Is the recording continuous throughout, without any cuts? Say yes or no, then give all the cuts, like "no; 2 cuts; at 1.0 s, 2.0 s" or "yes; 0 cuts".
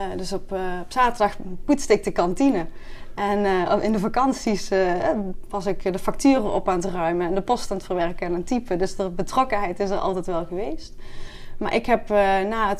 yes; 0 cuts